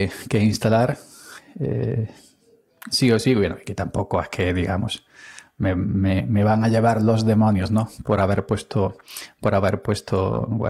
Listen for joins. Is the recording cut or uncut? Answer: uncut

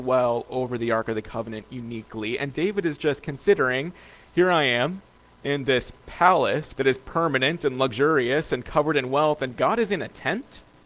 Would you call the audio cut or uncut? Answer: cut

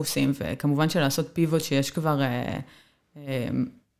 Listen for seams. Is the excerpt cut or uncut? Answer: uncut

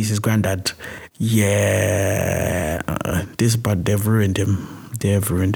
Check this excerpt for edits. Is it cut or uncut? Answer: cut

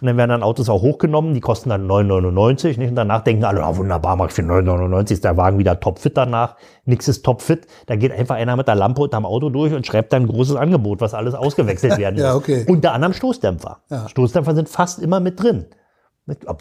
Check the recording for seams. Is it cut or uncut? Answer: uncut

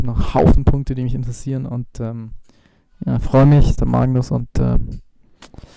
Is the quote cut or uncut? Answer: cut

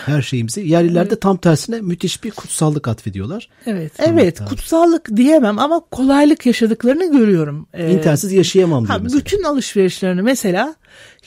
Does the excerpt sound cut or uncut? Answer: cut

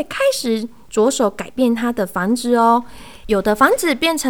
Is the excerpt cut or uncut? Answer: cut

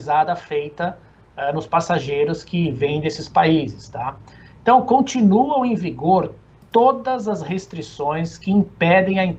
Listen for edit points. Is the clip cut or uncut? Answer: uncut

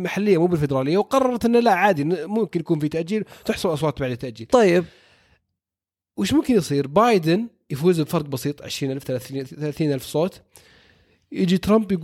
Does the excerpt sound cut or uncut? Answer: cut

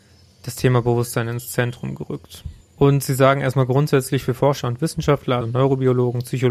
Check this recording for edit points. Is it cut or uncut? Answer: cut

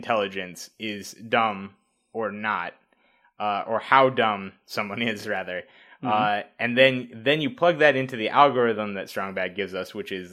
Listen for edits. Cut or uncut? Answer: uncut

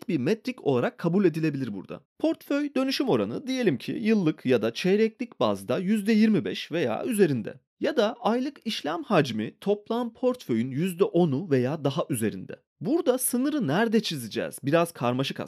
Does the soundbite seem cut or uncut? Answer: cut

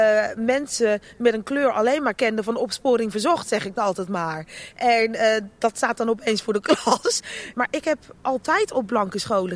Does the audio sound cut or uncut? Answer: cut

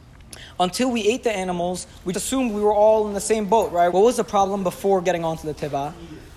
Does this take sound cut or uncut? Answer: cut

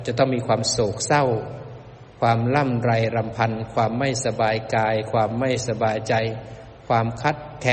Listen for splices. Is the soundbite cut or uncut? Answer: uncut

